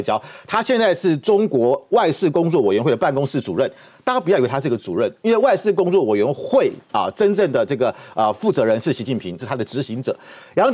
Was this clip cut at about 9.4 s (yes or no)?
yes